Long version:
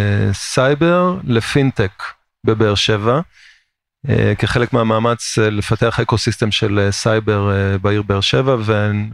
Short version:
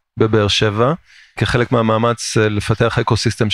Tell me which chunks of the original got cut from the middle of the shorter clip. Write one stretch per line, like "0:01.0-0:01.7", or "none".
0:03.6-0:04.4

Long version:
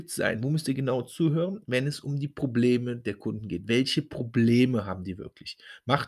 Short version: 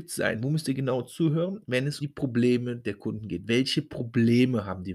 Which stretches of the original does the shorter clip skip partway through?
0:02.0-0:02.2

